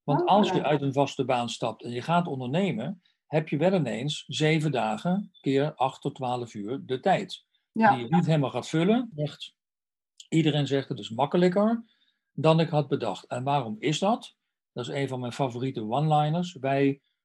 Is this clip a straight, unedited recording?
no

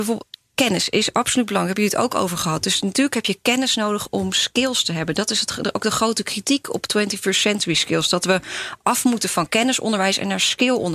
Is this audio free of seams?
yes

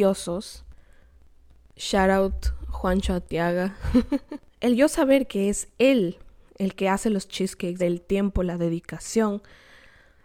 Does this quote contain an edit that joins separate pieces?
yes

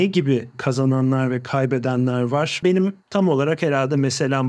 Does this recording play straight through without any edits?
no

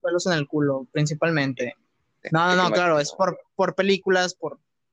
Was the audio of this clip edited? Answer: no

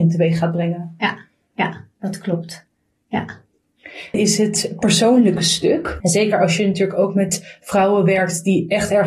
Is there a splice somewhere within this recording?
yes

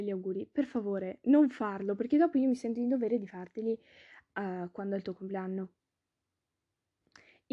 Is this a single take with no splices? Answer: yes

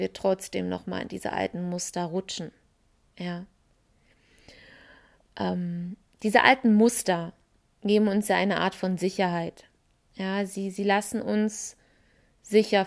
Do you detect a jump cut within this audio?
no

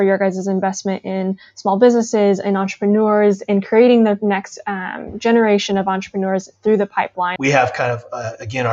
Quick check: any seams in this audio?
yes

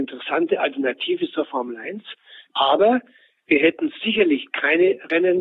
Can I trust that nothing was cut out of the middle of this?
no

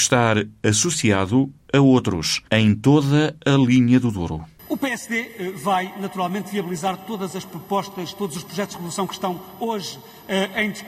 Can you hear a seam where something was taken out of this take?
yes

